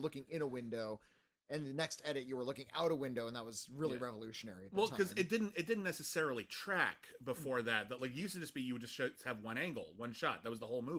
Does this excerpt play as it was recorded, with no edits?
yes; 0 cuts

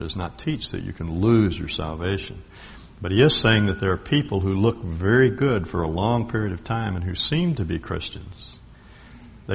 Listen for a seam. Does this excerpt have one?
no; 0 cuts

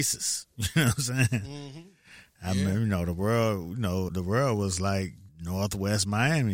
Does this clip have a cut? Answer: yes; 2 cuts; at 4.1 s, 5.3 s

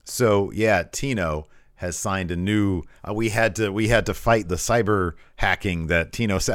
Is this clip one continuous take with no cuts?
no; 2 cuts; at 3.0 s, 4.4 s

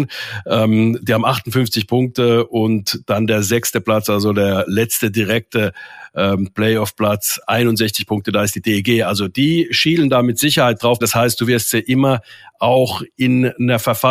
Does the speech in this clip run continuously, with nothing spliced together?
no; 1 cut; at 11.0 s

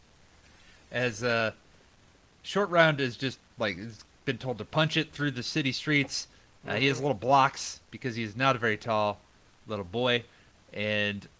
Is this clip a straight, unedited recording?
yes; 0 cuts

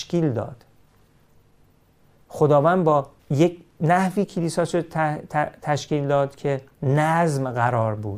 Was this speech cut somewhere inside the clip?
yes; 1 cut; at 3.2 s

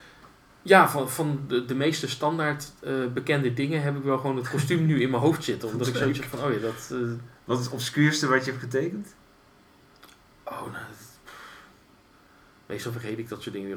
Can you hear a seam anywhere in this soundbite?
no; 0 cuts

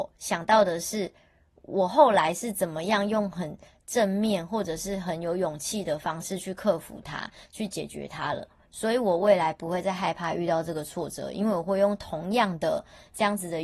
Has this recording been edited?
no; 0 cuts

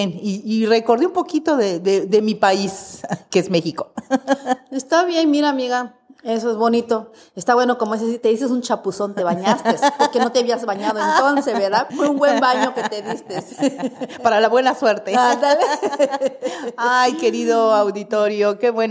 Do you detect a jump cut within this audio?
yes; 1 cut; at 11.9 s

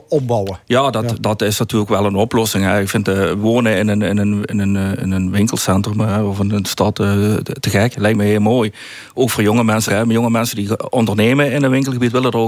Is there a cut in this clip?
yes; 1 cut; at 9.9 s

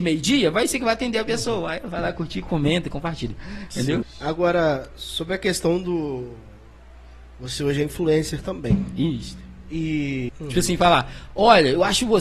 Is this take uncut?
no; 2 cuts; at 4.0 s, 10.3 s

